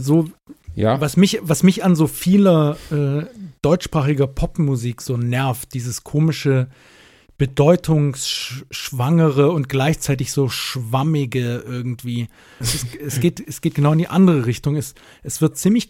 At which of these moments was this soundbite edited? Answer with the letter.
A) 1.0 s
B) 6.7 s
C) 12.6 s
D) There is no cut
C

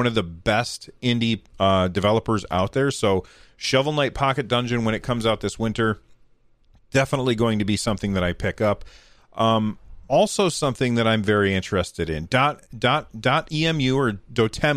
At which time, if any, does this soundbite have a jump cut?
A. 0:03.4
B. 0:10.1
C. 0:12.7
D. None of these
B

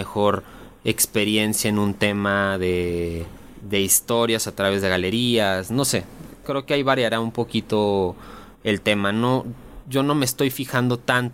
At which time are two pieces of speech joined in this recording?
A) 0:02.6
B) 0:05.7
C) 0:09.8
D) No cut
D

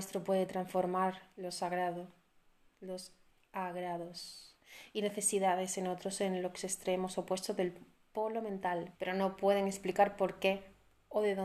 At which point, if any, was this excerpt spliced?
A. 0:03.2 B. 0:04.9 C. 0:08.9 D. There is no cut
C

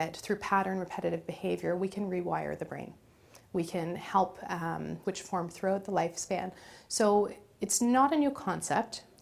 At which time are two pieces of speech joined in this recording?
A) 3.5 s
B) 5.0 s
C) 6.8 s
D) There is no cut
B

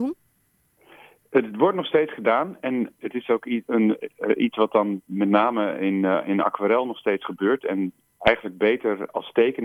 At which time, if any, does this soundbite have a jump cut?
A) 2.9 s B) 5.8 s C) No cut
A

